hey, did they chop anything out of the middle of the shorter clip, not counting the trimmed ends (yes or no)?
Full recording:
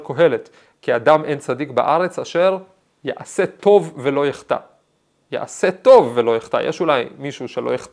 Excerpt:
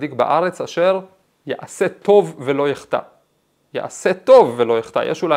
no